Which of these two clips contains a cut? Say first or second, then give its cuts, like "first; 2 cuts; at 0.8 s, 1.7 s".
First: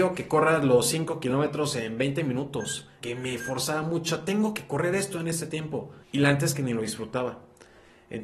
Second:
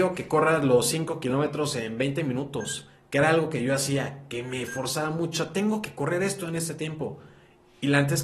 first; 2 cuts; at 3.0 s, 6.0 s